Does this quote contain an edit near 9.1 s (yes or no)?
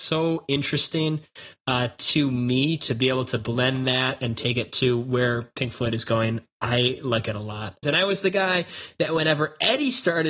no